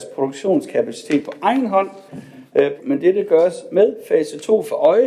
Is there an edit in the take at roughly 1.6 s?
no; 1 cut; at 2.8 s

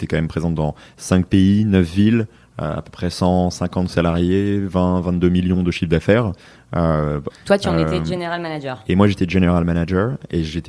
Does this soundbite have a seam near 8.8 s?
no; 1 cut; at 7.3 s

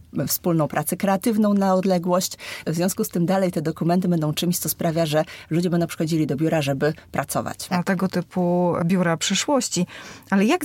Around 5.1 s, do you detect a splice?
no; 2 cuts; at 2.6 s, 7.7 s

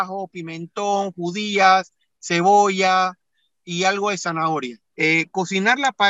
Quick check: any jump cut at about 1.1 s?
no; 1 cut; at 4.9 s

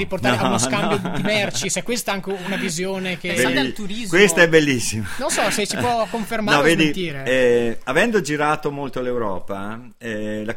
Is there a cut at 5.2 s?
no; 0 cuts

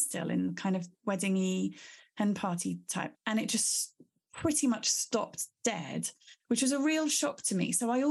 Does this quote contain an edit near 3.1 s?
yes; 1 cut; at 3.1 s

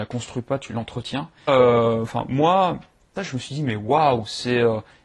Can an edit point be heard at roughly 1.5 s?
yes; 2 cuts; at 1.5 s, 3.2 s

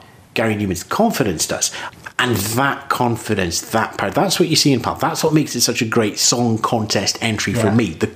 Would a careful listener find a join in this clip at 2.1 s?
no; 0 cuts

